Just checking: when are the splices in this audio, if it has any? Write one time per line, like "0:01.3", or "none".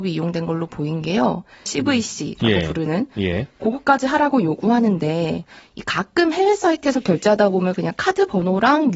0:01.7